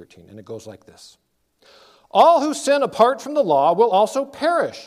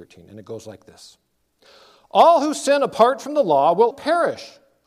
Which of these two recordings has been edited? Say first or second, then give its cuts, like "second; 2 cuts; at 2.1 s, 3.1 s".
second; 1 cut; at 3.9 s